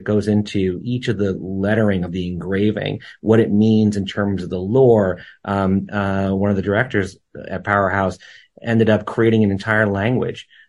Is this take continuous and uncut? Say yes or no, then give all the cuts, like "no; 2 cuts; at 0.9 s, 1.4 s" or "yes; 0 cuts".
no; 1 cut; at 5.9 s